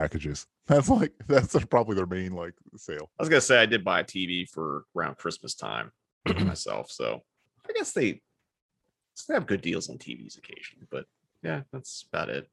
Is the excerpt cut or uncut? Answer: uncut